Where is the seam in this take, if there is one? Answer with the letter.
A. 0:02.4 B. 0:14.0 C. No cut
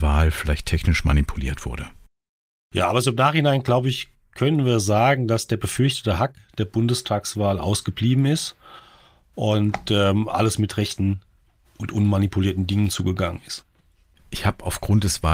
C